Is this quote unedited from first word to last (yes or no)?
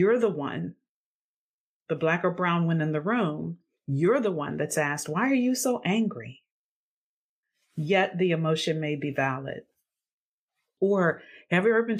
yes